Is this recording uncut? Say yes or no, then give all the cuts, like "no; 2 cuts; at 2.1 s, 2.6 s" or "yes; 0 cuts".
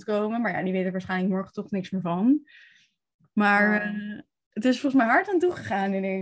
yes; 0 cuts